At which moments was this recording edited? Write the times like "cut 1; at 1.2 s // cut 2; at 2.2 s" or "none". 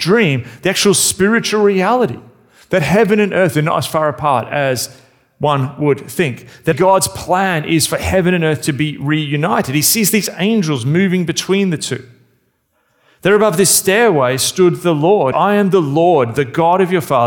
cut 1; at 6.7 s // cut 2; at 15.3 s